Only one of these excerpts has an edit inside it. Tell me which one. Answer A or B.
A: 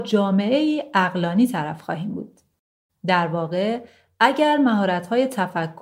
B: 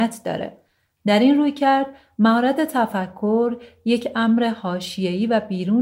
A